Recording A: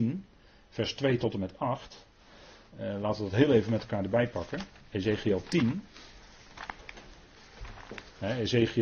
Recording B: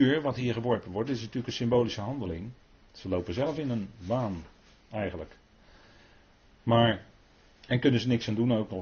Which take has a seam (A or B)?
B